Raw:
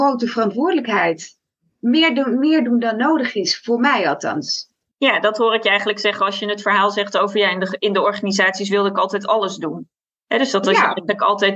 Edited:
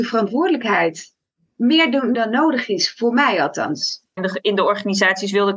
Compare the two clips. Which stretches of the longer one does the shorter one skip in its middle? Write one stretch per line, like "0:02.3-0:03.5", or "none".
0:02.4-0:02.8
0:04.8-0:07.5

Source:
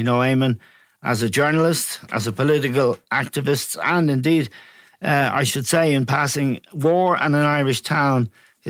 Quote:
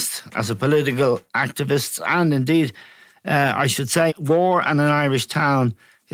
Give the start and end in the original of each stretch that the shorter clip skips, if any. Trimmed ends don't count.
0:05.9-0:06.6

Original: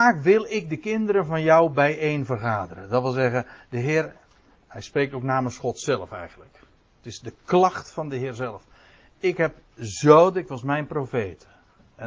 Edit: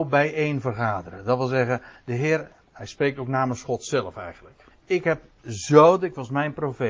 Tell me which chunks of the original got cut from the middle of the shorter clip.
0:04.3-0:04.6
0:06.6-0:09.0

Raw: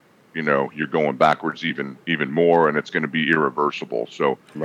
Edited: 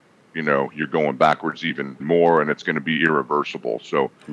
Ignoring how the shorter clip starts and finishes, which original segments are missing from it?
0:02.0-0:02.3

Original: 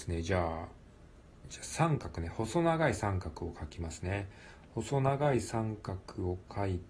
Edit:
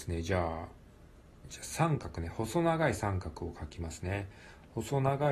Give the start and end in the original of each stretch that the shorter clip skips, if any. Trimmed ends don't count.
none

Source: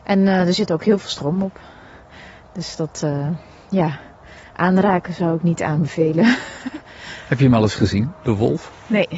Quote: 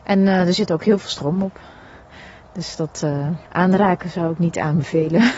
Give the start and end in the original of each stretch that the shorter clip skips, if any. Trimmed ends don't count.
0:03.4-0:04.5

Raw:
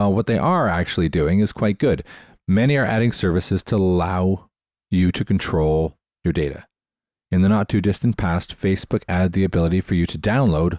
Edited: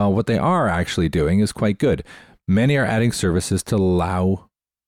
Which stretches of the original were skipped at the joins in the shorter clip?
none

